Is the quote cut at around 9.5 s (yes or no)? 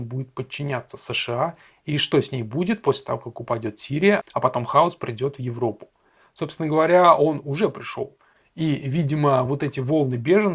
no